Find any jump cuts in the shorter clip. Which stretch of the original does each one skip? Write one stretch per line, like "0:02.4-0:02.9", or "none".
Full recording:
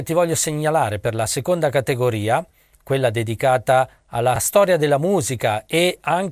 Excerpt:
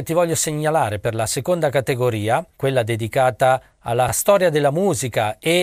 0:02.5-0:02.8